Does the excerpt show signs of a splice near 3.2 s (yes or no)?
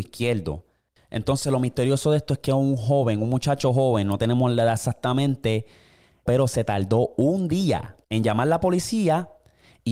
no